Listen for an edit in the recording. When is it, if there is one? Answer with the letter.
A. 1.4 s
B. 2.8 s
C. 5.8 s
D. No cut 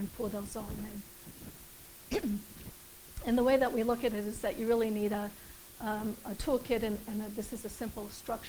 D